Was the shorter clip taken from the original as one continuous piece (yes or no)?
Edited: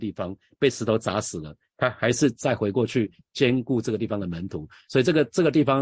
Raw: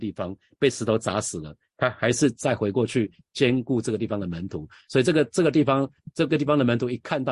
yes